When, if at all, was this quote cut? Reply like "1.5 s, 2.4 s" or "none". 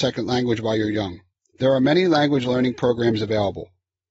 1.4 s